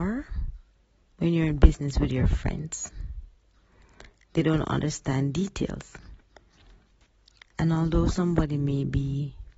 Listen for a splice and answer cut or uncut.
cut